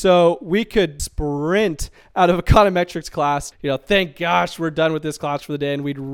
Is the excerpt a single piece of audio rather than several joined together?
no; 2 cuts; at 1.0 s, 3.5 s

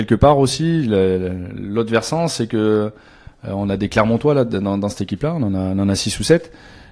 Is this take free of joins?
yes; 0 cuts

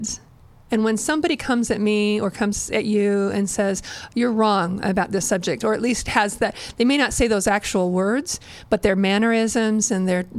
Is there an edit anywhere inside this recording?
no; 0 cuts

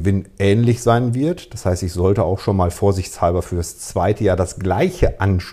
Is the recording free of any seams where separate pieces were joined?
yes; 0 cuts

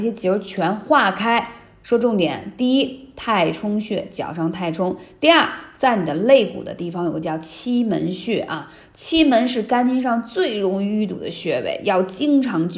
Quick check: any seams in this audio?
no; 0 cuts

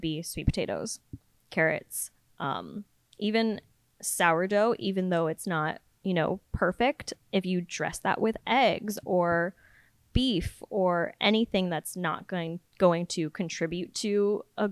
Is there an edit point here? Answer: no; 0 cuts

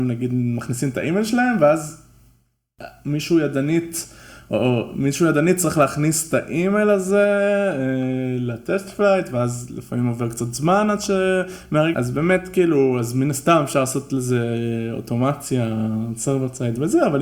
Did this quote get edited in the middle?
yes; 1 cut; at 11.9 s

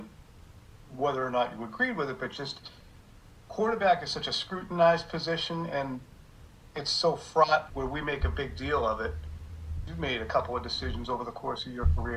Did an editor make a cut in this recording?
yes; 2 cuts; at 7.7 s, 9.9 s

